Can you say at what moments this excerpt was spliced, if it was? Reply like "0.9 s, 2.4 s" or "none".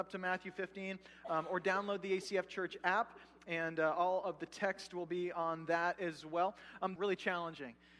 7.0 s